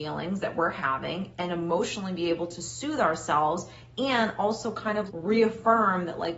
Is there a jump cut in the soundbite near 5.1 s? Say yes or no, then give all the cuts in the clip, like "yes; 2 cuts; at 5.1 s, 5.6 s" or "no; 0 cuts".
yes; 1 cut; at 5.1 s